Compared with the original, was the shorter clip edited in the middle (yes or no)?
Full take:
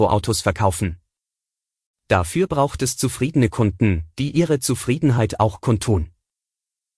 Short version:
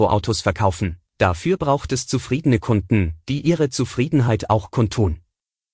yes